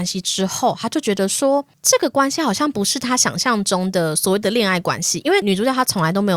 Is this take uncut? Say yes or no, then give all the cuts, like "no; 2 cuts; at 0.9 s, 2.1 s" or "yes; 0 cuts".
yes; 0 cuts